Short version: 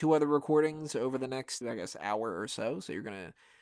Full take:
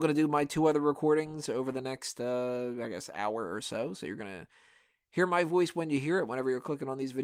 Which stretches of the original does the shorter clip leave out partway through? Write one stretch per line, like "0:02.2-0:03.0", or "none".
0:02.1-0:02.7